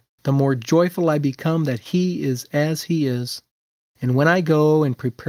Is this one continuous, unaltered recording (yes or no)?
no